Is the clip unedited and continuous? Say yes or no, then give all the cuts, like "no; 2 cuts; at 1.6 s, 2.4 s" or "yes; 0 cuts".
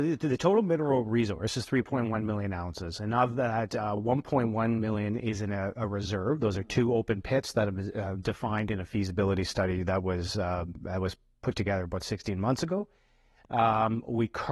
yes; 0 cuts